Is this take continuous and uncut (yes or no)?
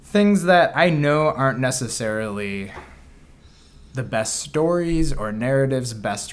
yes